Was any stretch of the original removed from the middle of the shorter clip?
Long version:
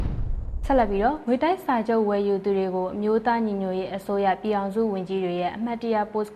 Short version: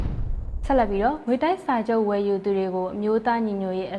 no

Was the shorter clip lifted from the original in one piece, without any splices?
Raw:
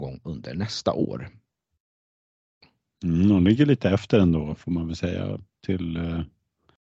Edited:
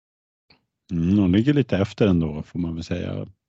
yes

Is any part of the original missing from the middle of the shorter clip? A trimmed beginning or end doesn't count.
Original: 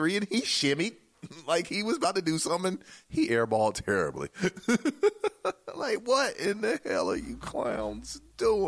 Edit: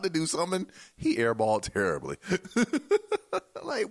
no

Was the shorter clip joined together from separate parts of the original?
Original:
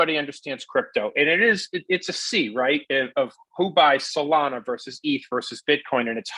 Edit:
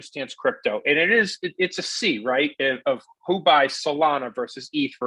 no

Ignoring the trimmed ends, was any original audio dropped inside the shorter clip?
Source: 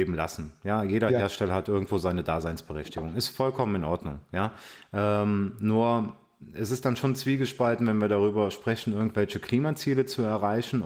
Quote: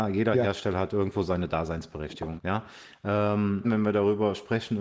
yes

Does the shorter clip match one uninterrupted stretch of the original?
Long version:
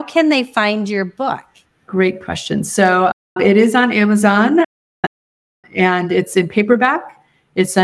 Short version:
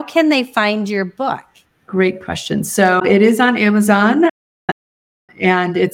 no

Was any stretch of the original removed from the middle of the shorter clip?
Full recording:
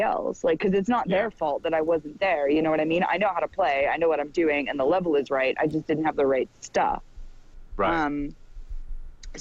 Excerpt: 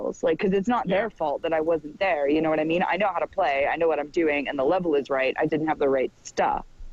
yes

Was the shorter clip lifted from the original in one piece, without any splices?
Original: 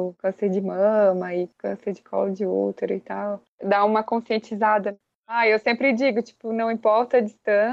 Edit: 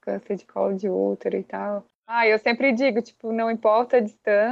no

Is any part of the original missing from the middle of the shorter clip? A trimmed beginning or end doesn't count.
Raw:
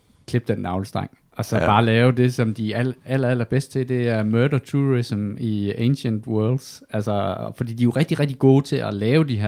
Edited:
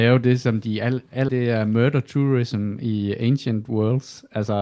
yes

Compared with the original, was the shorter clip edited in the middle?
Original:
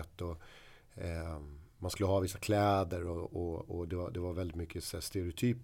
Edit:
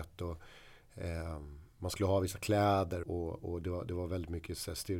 yes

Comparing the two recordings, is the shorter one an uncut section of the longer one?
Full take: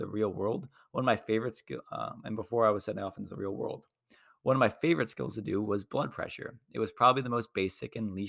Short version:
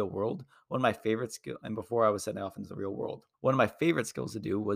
no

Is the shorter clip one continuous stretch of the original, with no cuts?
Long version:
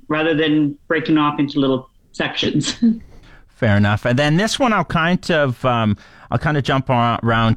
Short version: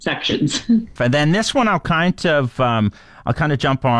no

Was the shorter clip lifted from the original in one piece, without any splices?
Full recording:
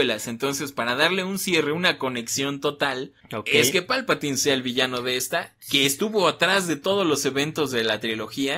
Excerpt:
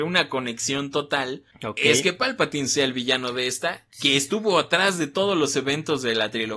yes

